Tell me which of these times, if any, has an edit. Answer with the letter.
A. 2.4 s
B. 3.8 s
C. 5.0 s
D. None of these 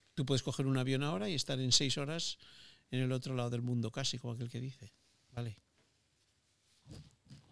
D